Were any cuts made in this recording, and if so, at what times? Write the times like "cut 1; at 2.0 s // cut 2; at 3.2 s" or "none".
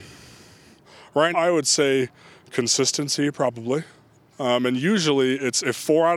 cut 1; at 1.3 s // cut 2; at 4.3 s